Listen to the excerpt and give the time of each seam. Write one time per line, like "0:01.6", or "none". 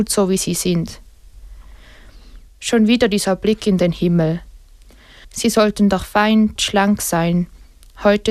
0:02.5
0:05.2
0:06.6